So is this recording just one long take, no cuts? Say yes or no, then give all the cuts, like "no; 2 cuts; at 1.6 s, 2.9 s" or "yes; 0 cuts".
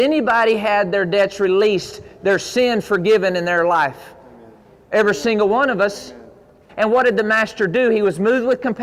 no; 1 cut; at 6.7 s